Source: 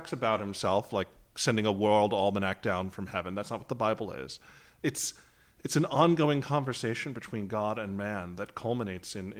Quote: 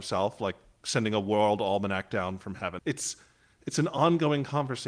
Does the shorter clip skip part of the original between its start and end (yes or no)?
yes